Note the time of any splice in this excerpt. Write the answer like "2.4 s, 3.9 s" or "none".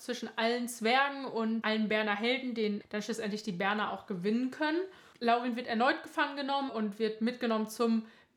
2.8 s, 6.7 s